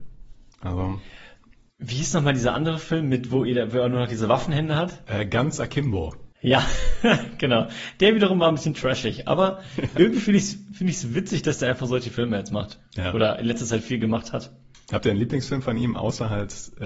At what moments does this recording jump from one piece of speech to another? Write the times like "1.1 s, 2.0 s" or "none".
6.3 s